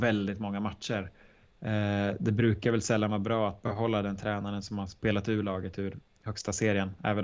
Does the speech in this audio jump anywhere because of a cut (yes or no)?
yes